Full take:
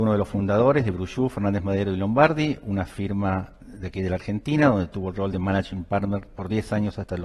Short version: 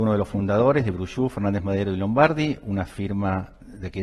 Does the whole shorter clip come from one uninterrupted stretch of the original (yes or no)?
yes